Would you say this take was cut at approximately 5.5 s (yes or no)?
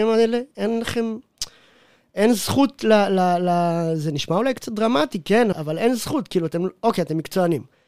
yes